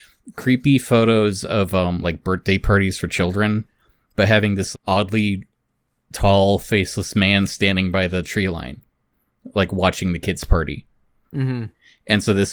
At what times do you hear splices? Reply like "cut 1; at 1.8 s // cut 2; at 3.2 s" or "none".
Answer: cut 1; at 2.0 s // cut 2; at 4.7 s // cut 3; at 11.2 s